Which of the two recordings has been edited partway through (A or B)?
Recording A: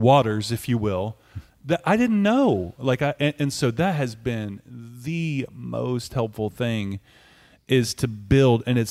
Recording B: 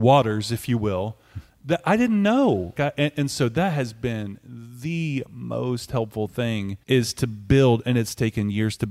B